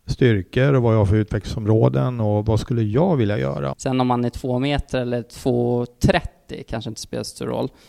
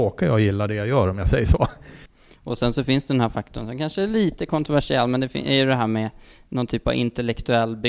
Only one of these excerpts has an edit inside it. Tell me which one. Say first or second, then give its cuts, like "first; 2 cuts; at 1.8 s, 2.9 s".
first; 1 cut; at 3.7 s